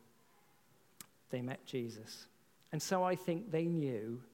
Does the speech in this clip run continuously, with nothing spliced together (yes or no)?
no